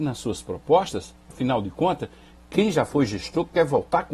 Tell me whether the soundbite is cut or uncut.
uncut